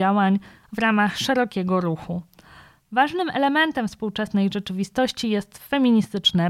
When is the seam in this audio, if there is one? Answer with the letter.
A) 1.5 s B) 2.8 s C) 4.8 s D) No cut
D